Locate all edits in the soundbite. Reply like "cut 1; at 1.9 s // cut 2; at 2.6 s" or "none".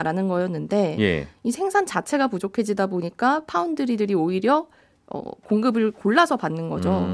none